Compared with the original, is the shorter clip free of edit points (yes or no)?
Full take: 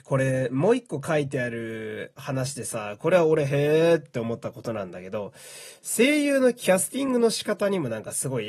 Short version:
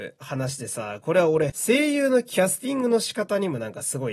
no